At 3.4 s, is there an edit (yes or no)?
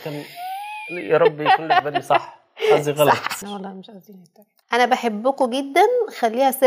yes